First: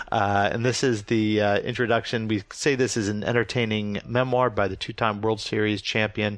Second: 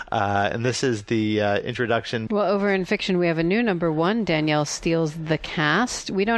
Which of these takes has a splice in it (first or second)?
second